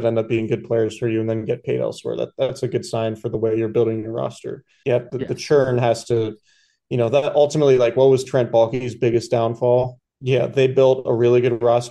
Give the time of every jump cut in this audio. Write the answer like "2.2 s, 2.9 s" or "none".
4.8 s, 10.0 s

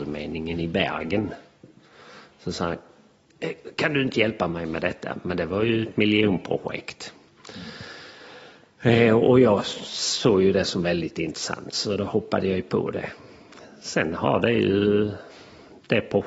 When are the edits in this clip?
none

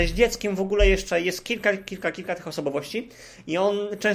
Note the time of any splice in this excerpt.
none

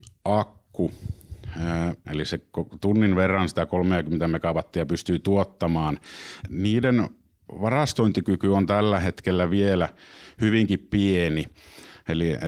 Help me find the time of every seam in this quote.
2.0 s, 6.4 s

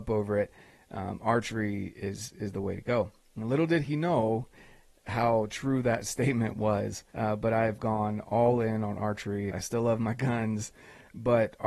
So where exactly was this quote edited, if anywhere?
7.1 s, 9.5 s

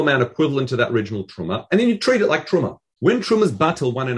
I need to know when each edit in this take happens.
3.0 s

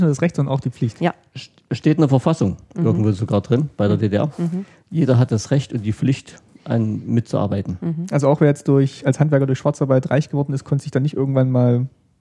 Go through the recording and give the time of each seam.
none

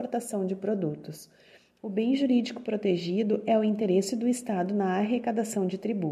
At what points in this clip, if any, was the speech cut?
1.8 s

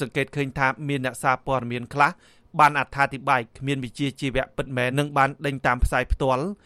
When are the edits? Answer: 4.9 s

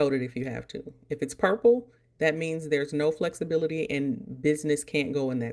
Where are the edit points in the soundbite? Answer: none

